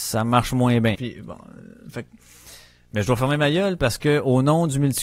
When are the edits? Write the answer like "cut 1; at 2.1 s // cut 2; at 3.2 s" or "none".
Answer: cut 1; at 1.0 s